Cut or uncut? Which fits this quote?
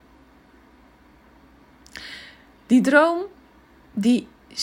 uncut